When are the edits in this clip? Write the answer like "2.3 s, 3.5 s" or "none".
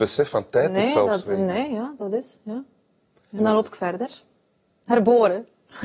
3.4 s